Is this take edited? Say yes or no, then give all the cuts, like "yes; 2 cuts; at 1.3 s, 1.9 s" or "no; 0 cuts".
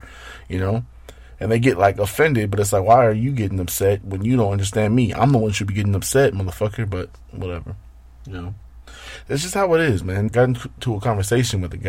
yes; 1 cut; at 10.3 s